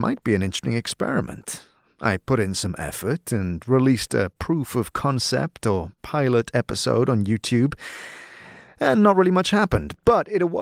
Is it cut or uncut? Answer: uncut